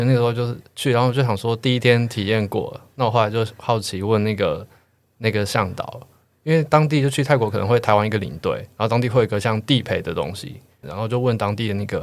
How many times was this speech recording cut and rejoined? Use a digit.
1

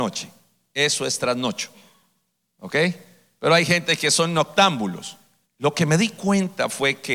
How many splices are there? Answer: 1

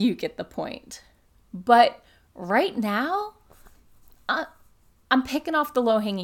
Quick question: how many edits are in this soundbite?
0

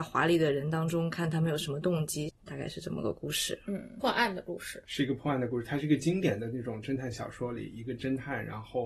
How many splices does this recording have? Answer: 1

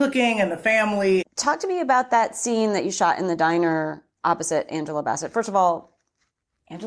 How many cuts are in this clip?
1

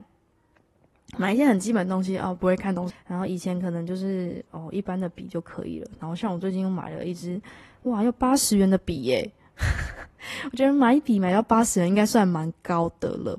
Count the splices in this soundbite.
1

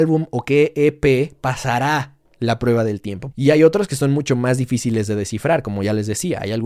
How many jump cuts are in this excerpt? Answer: 1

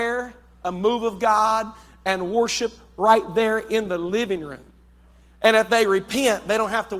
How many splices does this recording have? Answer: 0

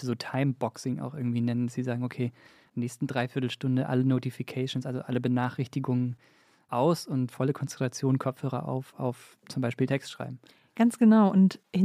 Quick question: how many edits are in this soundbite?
0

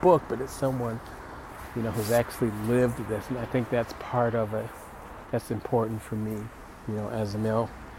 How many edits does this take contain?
1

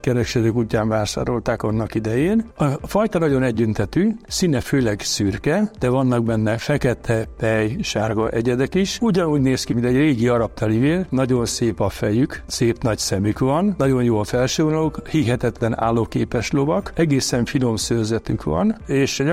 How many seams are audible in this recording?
2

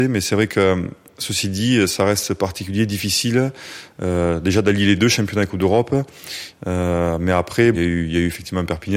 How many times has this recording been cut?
2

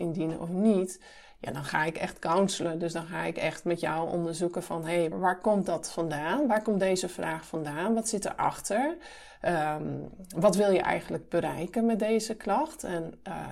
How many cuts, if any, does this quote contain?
1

